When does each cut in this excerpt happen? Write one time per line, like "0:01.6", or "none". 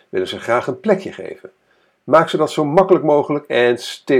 none